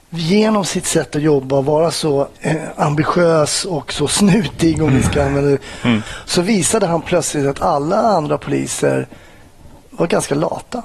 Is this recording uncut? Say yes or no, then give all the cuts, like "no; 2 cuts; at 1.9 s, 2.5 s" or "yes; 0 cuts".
no; 1 cut; at 2.4 s